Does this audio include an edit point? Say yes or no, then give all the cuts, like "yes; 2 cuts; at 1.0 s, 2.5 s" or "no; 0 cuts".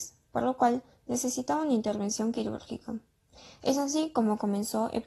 no; 0 cuts